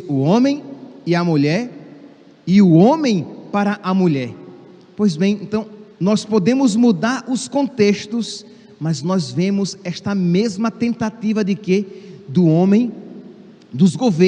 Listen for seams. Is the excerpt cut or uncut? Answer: cut